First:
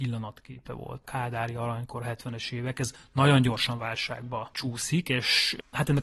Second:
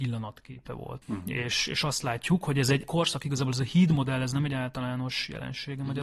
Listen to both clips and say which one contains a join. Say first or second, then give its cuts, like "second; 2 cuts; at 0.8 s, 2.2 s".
second; 1 cut; at 1.0 s